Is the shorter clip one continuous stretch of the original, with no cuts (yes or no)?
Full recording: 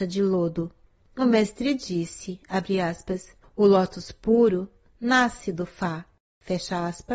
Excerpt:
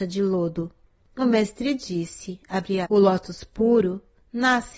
no